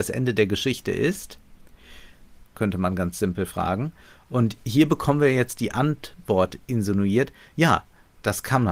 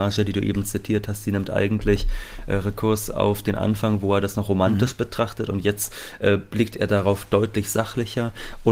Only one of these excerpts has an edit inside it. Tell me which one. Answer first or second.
first